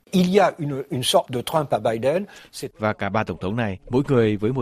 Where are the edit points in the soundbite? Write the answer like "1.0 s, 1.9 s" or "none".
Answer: 1.3 s, 2.7 s

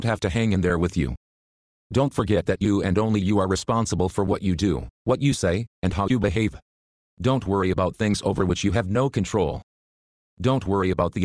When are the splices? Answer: 7.1 s

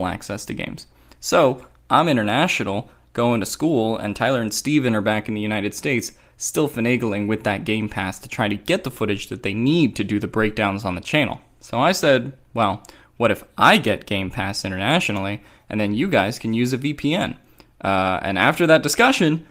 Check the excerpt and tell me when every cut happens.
none

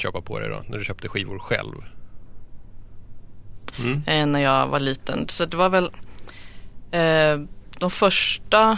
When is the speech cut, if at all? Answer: 3.7 s

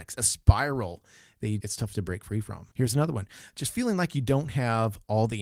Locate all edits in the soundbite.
1.6 s, 2.7 s

